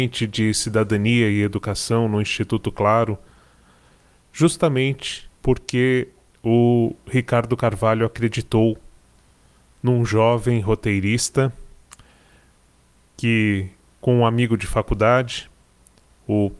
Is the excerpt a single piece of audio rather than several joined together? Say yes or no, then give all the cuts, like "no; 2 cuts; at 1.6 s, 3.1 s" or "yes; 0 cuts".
no; 1 cut; at 5.3 s